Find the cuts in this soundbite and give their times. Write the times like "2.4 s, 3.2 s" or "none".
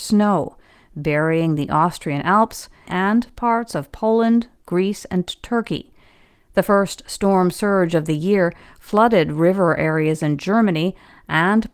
2.9 s